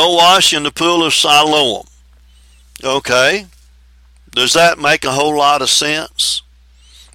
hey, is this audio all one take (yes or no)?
yes